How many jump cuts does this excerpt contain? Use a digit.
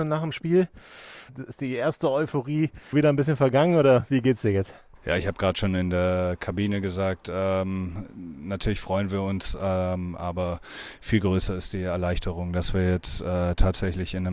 1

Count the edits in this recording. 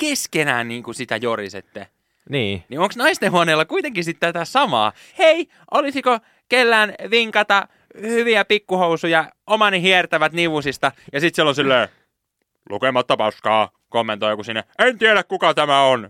2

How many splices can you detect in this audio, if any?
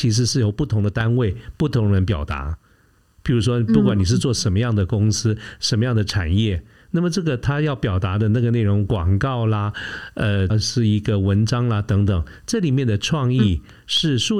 1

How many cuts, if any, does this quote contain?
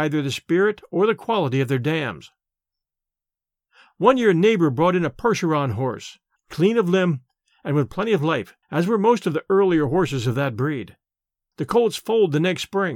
3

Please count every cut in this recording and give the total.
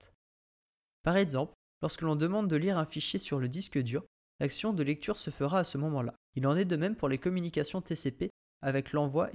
2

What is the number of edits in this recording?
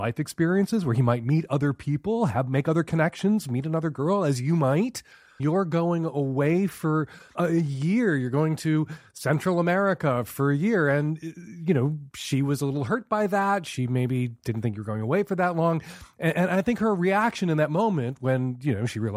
2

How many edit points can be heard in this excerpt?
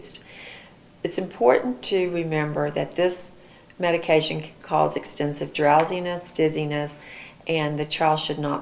0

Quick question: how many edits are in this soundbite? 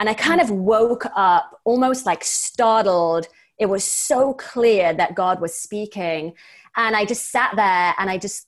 0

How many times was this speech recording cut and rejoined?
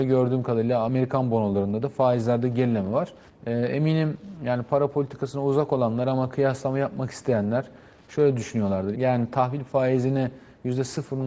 2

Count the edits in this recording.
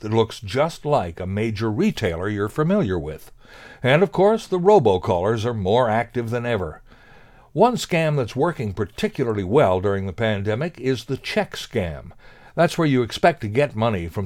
0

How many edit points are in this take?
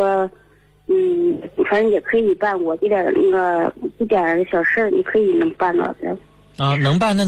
1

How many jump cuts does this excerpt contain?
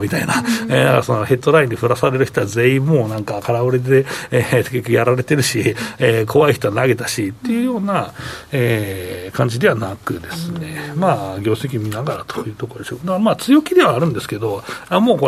1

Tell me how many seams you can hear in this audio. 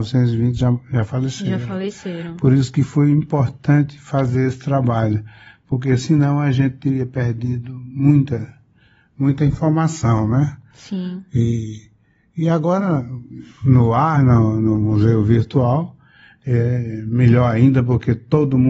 1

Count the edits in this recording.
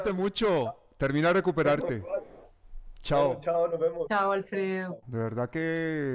1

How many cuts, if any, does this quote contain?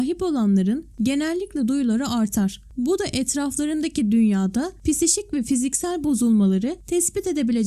0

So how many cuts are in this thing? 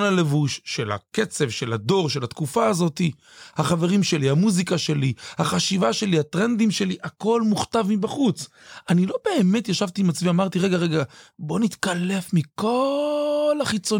1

